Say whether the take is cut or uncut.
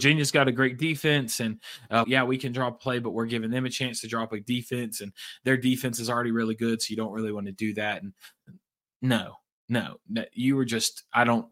cut